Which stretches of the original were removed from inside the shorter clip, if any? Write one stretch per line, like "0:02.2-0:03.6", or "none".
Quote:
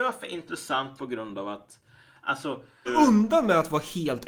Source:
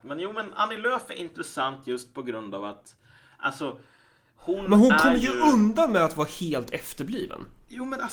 0:01.8-0:02.1
0:04.0-0:05.3